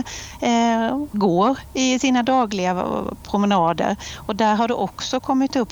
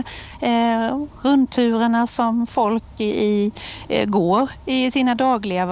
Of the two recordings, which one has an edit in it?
first; 1 cut; at 1.1 s

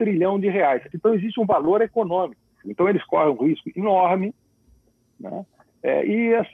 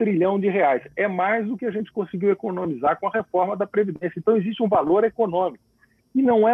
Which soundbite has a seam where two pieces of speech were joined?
first; 2 cuts; at 0.9 s, 2.6 s

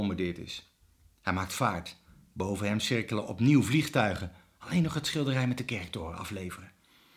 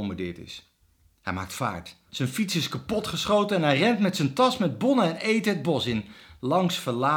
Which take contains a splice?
second; 1 cut; at 2.1 s

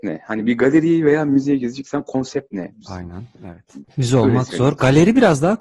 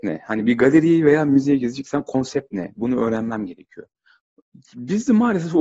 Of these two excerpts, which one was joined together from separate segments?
first; 2 cuts; at 2.7 s, 3.8 s

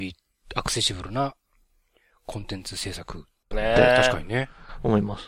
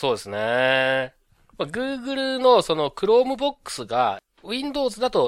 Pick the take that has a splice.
first; 1 cut; at 3.5 s

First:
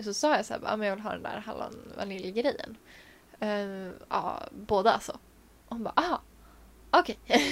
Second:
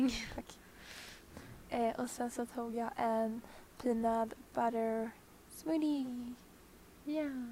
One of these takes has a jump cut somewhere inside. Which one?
first; 1 cut; at 4.1 s

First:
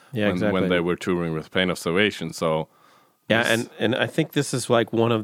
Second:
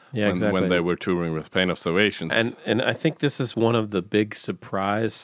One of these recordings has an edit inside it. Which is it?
second; 2 cuts; at 2.3 s, 3.5 s

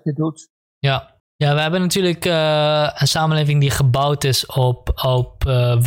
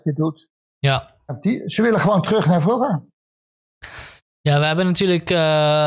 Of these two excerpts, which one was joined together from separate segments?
first; 1 cut; at 1.2 s

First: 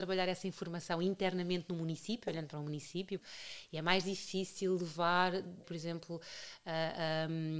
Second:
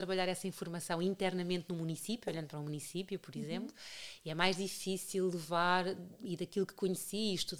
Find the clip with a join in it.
first; 2 cuts; at 3.2 s, 5.6 s

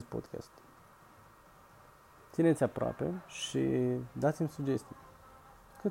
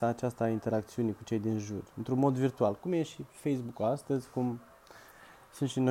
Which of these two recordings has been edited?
first; 1 cut; at 3.3 s

